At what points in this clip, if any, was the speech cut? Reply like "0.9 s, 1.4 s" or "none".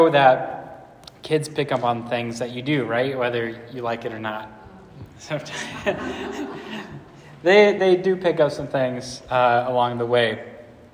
7.8 s

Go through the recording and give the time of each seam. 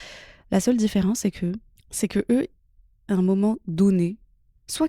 1.8 s

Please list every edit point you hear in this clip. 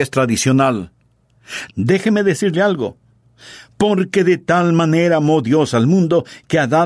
1.7 s

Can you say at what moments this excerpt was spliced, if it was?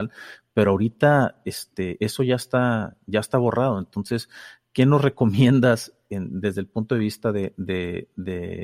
none

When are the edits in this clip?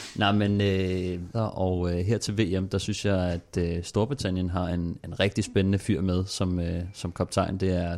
1.3 s

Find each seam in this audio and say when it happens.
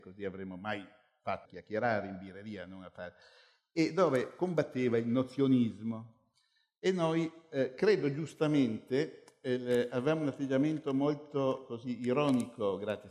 1.4 s

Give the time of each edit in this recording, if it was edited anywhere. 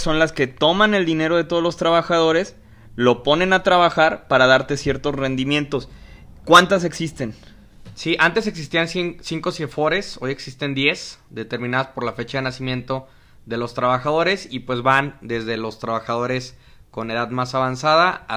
none

